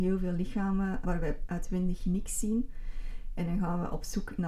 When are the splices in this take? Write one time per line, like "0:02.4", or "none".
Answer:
0:01.0